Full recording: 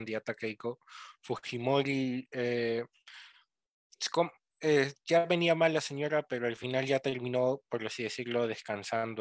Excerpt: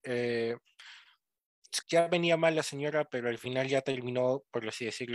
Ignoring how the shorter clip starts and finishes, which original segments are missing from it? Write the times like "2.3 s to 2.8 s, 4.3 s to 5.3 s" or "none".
4.1 s to 5.0 s

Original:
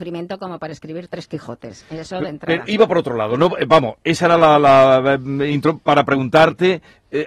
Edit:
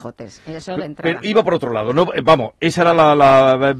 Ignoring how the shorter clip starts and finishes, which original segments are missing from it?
none

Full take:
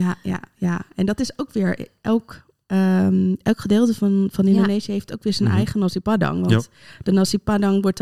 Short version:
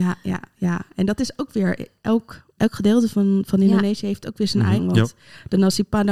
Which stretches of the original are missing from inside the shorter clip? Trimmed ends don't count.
2.6 s to 3.4 s, 5.6 s to 6.3 s

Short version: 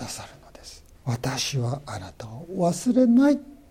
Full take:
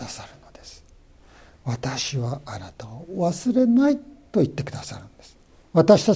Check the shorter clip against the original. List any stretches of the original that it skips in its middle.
0.9 s to 1.5 s

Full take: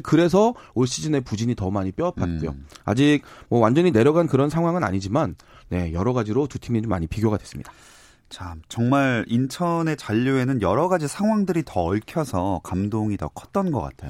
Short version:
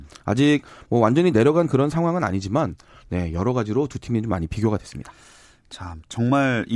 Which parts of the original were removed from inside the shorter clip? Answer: none

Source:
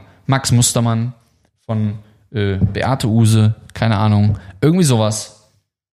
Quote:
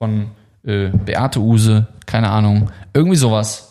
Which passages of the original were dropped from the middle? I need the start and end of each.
none

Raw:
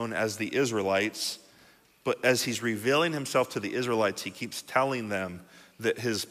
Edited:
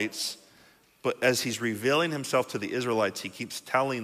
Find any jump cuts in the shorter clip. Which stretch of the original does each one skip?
none

